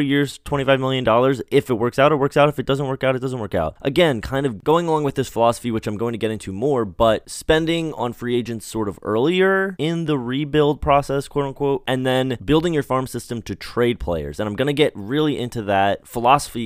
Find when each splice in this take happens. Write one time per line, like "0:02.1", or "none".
none